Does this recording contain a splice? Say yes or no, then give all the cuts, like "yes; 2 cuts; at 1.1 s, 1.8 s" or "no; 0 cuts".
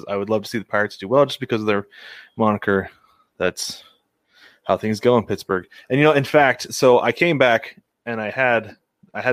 no; 0 cuts